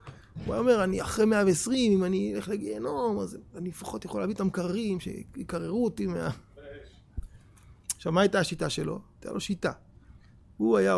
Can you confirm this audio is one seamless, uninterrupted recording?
yes; 0 cuts

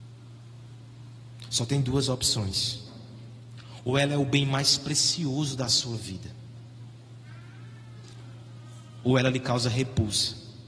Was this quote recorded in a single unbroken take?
yes; 0 cuts

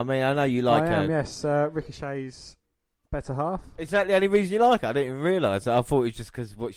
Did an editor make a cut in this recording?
no; 0 cuts

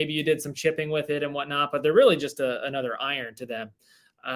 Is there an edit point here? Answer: no; 0 cuts

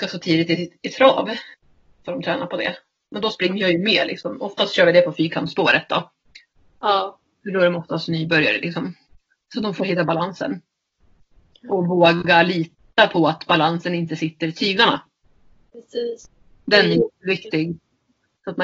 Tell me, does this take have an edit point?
no; 0 cuts

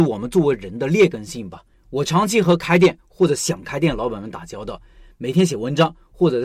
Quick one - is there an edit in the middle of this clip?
yes; 1 cut; at 1.7 s

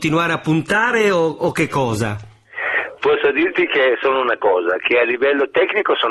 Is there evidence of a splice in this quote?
yes; 1 cut; at 3.0 s

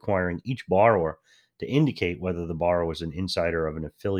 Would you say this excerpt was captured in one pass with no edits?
yes; 0 cuts

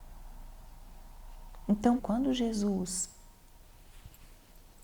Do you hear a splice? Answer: yes; 1 cut; at 2.0 s

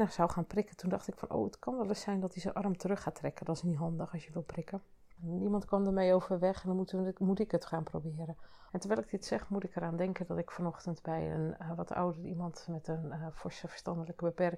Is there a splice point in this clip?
yes; 2 cuts; at 5.2 s, 8.7 s

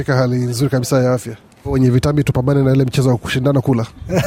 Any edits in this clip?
yes; 1 cut; at 1.6 s

